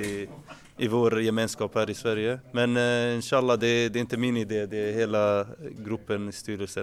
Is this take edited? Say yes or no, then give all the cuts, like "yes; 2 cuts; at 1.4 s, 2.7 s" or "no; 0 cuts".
yes; 1 cut; at 2.4 s